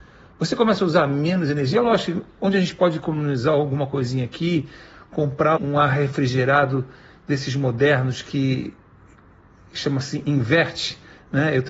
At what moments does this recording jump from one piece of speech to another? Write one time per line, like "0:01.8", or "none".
0:01.7
0:05.6

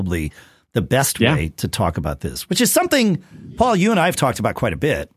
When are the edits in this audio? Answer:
none

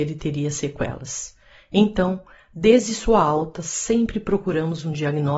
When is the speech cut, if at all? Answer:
none

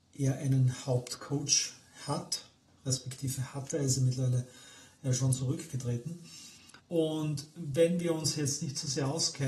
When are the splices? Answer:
0:06.8

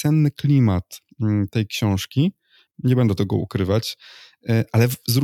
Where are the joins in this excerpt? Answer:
0:02.7

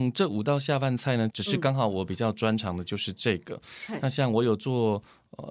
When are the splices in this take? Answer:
0:01.3

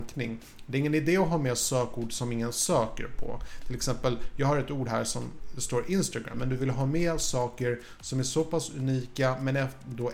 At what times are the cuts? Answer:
0:06.3

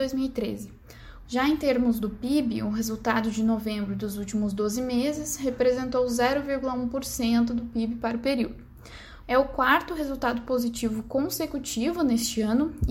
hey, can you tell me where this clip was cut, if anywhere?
0:01.2
0:09.2

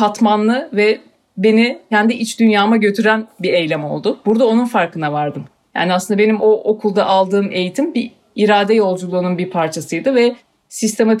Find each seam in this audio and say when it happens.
none

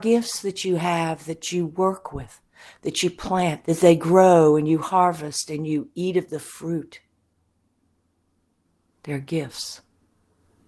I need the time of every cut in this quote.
0:03.6

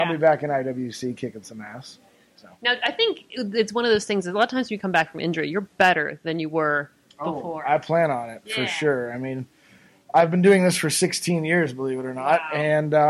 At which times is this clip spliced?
none

